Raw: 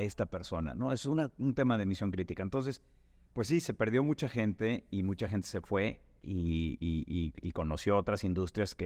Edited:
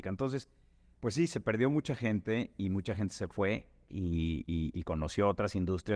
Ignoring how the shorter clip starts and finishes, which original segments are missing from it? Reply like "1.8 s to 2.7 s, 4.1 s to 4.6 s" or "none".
7.0 s to 7.4 s

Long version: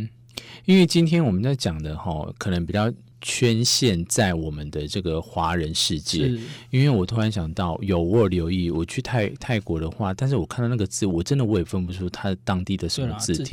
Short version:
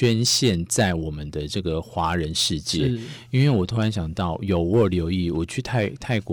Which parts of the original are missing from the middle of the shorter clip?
none

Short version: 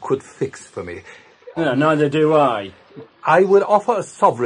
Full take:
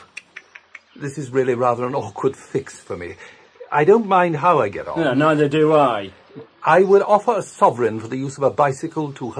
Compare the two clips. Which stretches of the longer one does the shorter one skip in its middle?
3.7 s to 4.9 s

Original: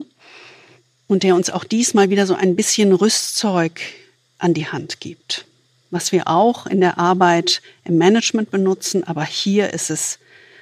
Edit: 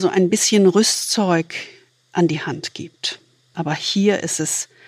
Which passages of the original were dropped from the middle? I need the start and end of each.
5.8 s to 9.0 s

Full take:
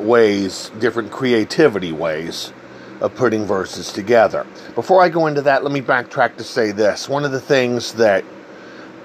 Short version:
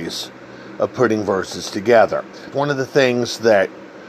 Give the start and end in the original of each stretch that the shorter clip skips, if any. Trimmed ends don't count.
4.7 s to 7.1 s

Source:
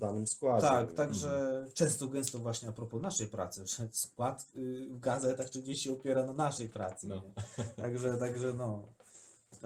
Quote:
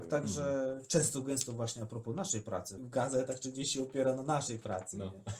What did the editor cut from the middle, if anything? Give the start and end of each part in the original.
3.6 s to 4.9 s

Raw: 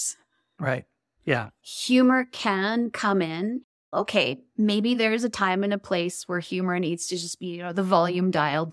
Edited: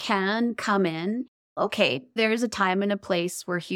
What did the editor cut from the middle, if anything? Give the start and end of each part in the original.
4.5 s to 5.0 s

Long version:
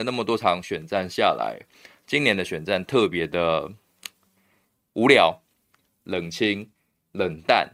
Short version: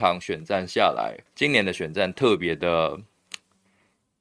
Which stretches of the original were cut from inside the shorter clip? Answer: 1.7 s to 2.0 s

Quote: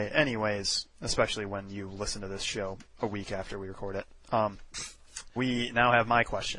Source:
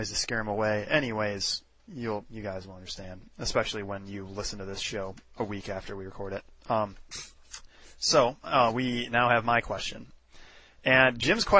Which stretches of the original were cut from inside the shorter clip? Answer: 1.7 s to 3.3 s, 7.7 s to 8.7 s

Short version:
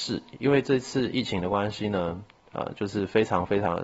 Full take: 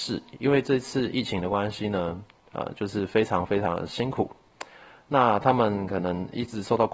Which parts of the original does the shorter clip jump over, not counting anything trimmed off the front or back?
none

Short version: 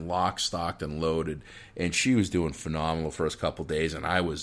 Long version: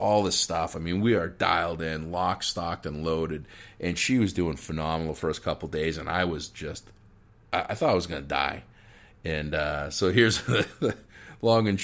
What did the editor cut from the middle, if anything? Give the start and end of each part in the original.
none

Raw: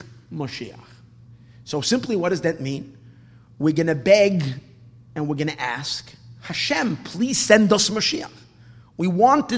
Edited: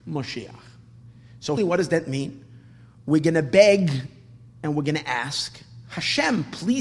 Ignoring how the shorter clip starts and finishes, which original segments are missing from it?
1.8 s to 2.1 s

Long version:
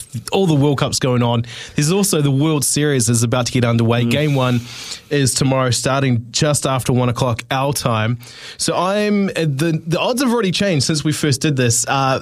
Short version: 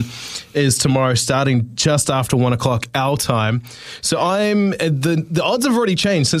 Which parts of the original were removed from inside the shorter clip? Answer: none

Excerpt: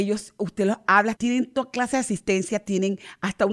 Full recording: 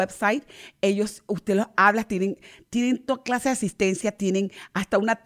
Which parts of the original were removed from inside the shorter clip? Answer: 2.0 s to 2.7 s

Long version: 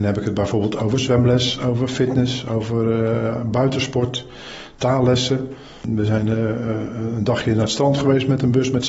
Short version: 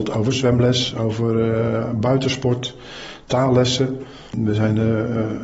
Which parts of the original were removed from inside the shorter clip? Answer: 1.6 s to 2.4 s

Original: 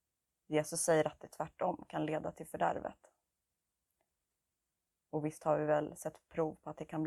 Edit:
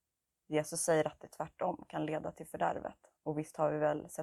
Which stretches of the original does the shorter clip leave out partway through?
3.2 s to 5.0 s

